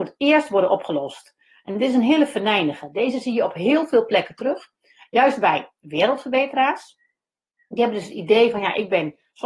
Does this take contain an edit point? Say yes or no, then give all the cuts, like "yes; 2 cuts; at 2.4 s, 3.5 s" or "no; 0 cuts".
no; 0 cuts